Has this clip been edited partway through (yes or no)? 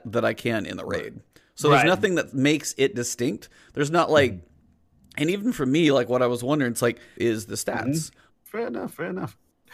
yes